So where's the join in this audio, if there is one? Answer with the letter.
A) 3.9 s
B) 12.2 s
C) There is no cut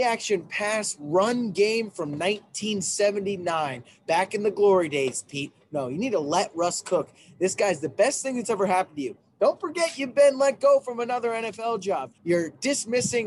B